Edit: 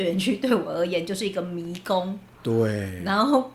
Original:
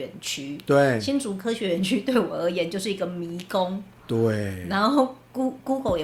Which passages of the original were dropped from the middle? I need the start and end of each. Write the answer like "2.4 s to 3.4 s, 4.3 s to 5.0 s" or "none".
none